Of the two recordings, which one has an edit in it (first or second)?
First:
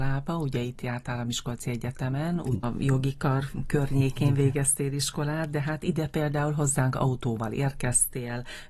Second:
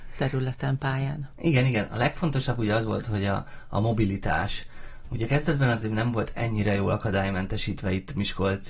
first